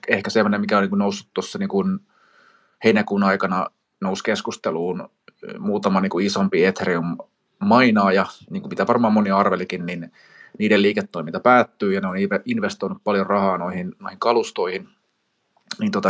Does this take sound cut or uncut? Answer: uncut